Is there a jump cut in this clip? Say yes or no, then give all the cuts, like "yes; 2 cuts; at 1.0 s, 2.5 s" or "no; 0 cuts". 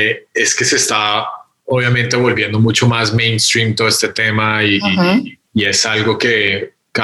yes; 1 cut; at 5.5 s